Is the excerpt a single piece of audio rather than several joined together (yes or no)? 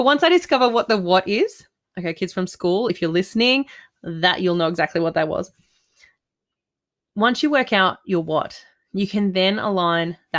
yes